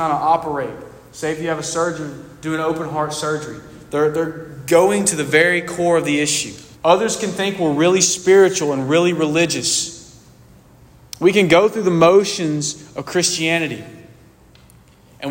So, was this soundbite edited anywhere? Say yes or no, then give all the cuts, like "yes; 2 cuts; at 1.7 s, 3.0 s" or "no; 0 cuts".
yes; 1 cut; at 6.7 s